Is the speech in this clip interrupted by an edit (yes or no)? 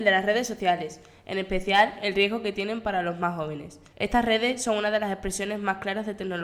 yes